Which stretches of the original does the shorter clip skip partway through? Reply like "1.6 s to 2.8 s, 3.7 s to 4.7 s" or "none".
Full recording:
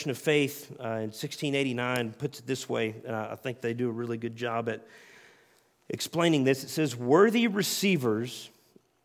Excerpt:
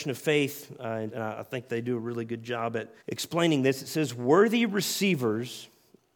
1.1 s to 3.0 s, 4.9 s to 5.8 s